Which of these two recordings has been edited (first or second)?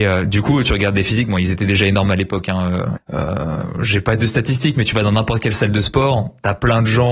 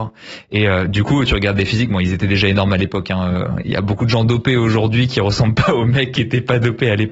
first